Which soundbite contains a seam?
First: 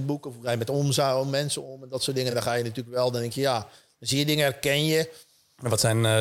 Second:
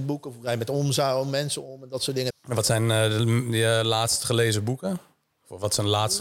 second; 1 cut; at 2.3 s

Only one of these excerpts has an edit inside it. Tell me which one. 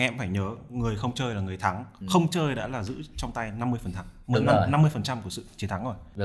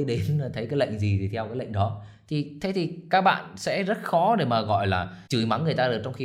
second; 1 cut; at 5.3 s

